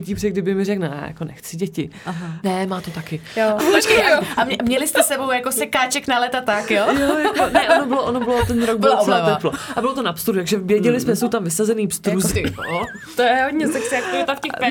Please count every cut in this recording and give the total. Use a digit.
3